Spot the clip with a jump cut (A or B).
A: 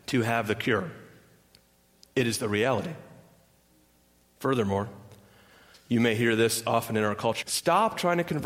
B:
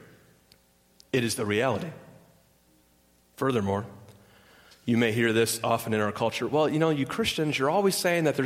A